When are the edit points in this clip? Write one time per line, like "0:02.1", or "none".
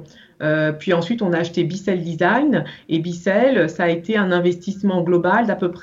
none